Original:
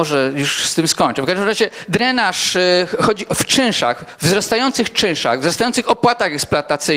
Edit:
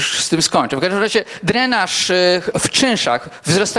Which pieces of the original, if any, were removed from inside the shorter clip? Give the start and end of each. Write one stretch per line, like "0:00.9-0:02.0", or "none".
0:03.0-0:03.3